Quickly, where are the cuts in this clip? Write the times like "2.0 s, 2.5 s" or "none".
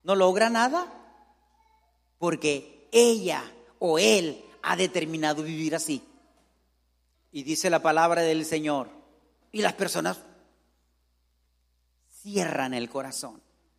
7.1 s, 9.4 s